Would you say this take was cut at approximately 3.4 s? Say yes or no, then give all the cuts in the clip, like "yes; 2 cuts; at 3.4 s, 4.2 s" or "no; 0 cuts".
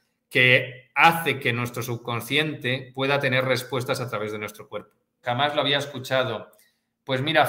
no; 1 cut; at 5.2 s